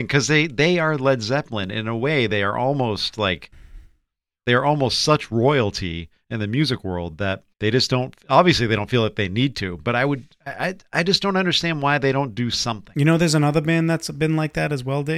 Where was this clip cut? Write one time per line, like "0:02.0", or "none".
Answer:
0:07.5